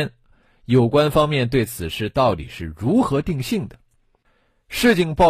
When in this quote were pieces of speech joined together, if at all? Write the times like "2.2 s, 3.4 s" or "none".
none